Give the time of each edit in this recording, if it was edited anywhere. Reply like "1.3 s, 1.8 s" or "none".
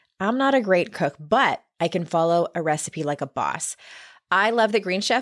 none